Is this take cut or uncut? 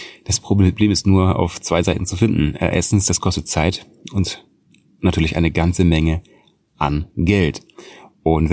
uncut